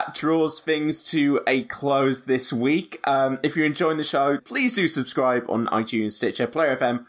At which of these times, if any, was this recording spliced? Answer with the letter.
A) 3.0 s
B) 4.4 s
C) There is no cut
B